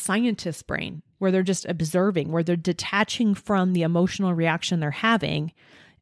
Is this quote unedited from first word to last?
no; 1 cut; at 1.1 s

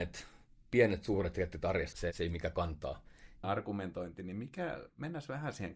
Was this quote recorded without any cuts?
no; 2 cuts; at 1.9 s, 3.4 s

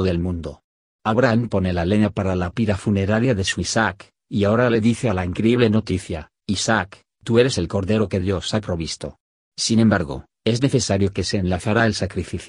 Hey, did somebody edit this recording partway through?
yes; 1 cut; at 9.5 s

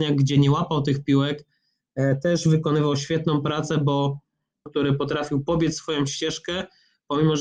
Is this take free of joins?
no; 1 cut; at 4.7 s

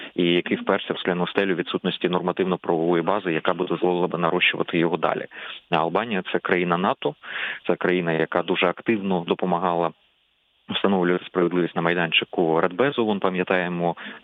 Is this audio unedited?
yes; 0 cuts

